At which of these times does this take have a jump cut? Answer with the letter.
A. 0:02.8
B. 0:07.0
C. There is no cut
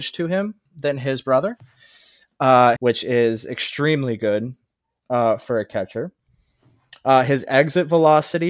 A